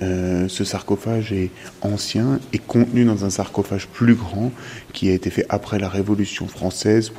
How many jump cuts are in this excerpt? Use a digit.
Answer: 0